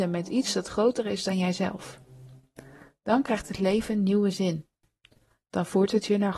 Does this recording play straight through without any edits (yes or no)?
yes